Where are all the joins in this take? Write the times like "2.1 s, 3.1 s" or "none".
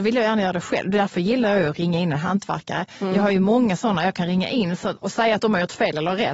5.0 s